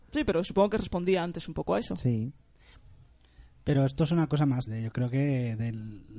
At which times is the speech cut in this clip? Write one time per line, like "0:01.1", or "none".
0:04.7